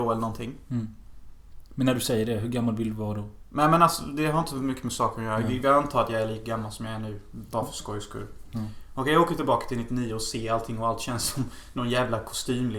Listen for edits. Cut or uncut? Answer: uncut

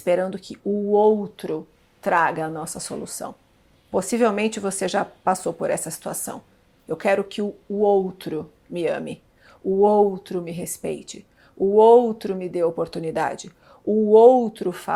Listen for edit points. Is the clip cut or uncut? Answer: uncut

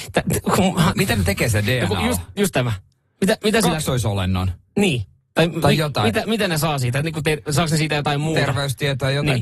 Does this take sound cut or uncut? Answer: uncut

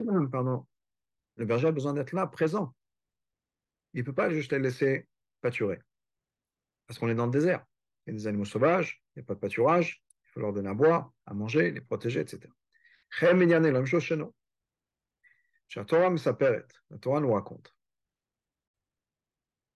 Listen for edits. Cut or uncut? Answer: uncut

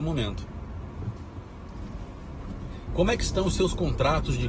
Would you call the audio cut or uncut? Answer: cut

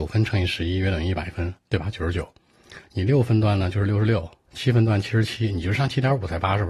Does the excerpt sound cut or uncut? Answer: uncut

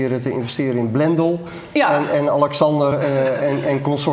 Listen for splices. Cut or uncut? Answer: uncut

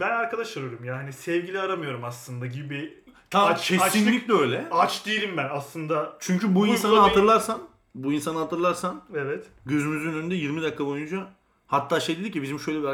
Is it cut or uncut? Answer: uncut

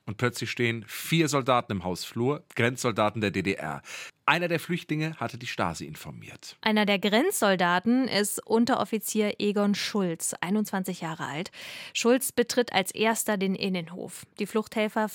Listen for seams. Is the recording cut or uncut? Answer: cut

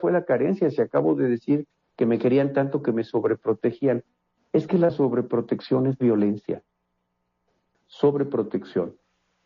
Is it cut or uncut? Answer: cut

